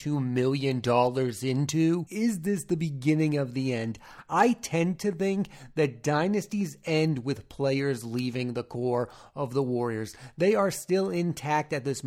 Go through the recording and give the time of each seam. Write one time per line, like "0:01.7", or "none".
0:02.1

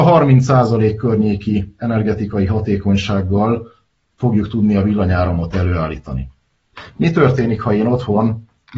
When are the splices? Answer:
none

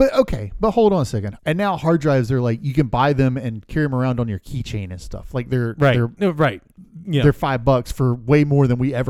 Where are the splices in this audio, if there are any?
0:01.4

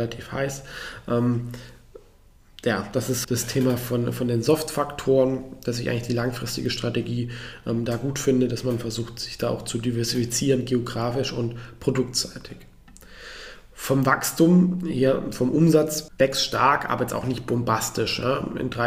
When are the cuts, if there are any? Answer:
0:03.2

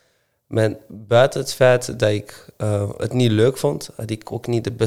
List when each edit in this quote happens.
none

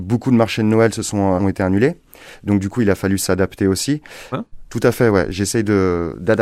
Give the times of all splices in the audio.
0:01.4
0:04.3

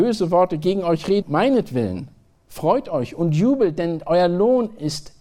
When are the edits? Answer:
0:01.2

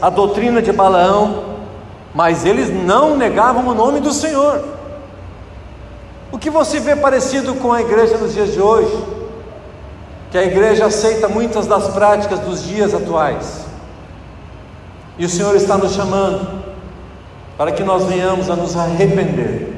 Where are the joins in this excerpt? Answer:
none

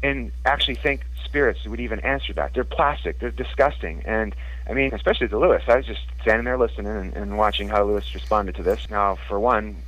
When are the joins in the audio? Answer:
0:04.9
0:08.9

